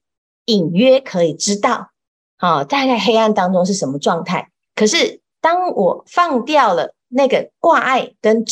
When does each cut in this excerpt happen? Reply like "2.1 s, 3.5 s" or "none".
4.7 s